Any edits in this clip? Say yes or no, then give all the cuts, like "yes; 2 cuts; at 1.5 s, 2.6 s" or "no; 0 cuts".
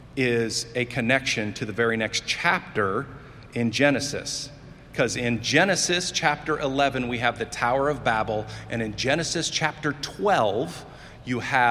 no; 0 cuts